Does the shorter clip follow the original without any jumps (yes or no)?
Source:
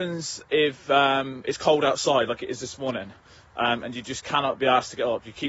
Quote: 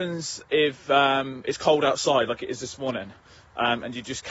yes